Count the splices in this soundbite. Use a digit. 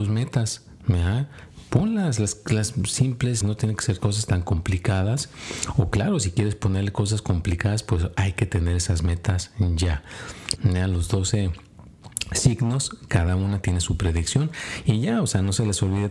2